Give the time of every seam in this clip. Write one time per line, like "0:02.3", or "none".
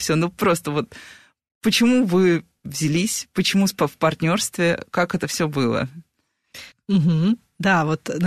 0:06.7